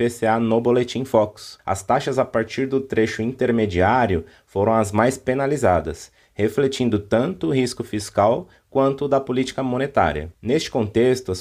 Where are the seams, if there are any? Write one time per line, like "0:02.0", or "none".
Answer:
none

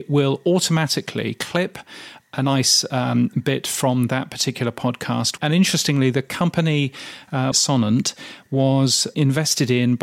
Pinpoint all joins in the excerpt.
0:05.4
0:07.5

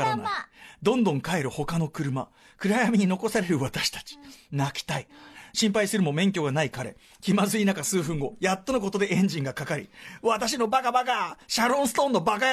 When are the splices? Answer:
none

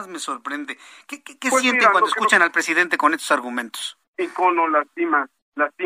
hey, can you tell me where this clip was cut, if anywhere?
none

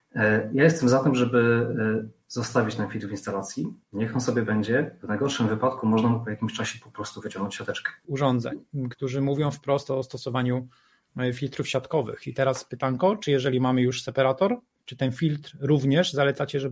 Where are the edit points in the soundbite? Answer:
0:03.8
0:08.0

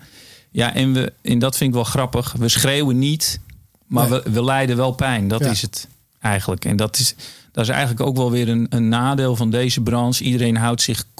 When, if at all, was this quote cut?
none

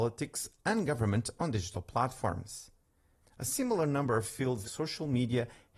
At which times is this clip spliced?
0:03.2
0:04.6

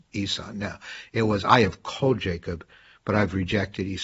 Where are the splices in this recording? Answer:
none

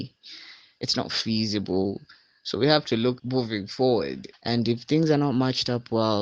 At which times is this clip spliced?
0:03.2
0:04.3

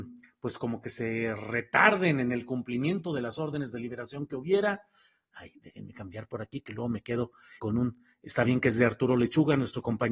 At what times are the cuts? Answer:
0:07.6

